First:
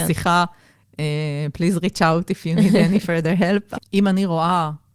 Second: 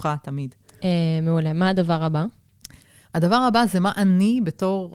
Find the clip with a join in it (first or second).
first